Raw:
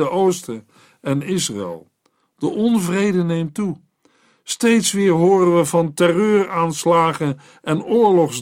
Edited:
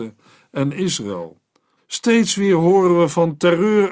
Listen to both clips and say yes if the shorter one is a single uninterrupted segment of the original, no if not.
no